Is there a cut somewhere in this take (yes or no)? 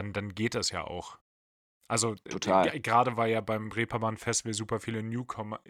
no